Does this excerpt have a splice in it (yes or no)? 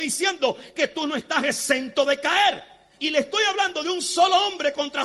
yes